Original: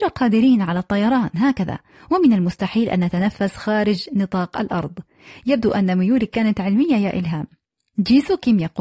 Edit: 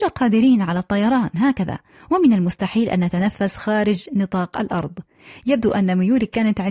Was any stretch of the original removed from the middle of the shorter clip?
no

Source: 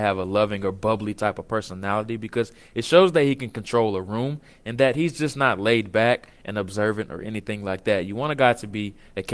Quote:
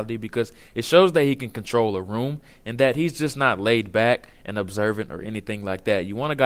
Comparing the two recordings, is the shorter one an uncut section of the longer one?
yes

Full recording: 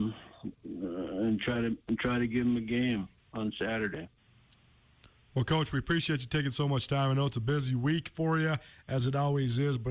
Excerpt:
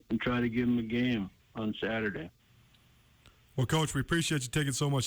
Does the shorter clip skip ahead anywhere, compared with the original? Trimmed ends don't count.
no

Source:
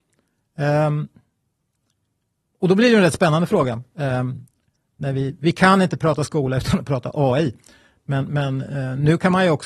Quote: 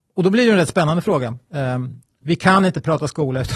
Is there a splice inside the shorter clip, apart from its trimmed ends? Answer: yes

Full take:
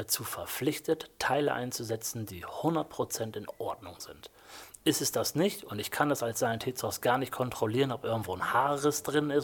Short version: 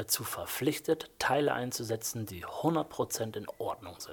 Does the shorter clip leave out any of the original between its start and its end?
no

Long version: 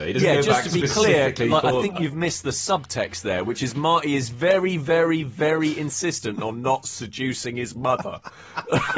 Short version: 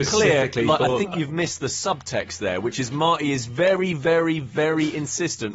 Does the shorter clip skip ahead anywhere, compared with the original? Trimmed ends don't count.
no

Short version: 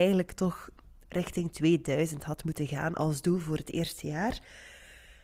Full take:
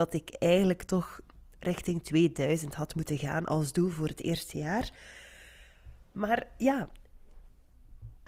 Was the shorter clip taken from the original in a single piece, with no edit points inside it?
yes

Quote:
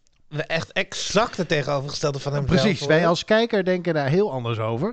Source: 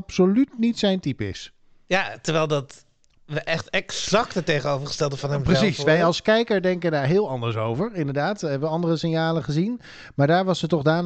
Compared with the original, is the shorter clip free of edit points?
yes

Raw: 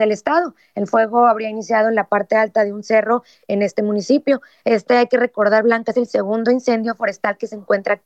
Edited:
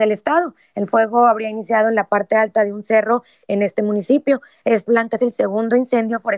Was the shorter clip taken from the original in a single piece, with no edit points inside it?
no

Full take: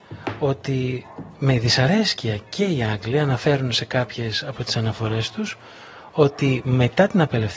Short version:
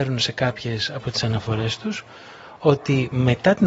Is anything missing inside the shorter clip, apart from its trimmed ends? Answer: no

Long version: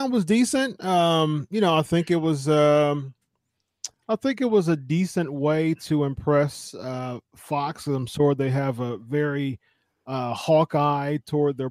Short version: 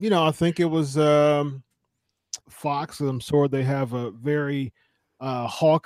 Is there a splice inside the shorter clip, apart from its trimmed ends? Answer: yes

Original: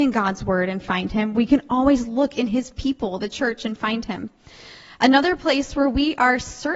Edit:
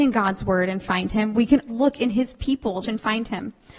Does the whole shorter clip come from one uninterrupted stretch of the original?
no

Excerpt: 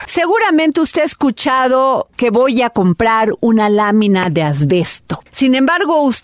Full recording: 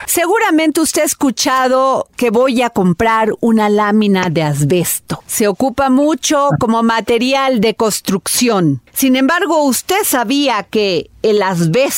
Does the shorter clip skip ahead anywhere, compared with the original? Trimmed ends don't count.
yes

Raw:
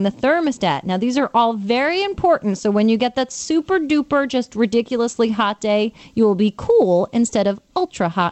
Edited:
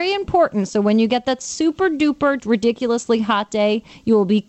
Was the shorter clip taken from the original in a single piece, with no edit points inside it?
no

